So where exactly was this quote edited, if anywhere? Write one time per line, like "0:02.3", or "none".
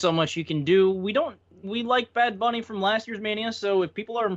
0:01.6